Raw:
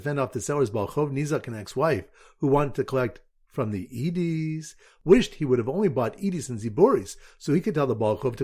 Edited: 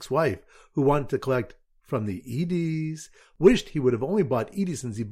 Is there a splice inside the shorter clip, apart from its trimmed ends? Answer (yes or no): no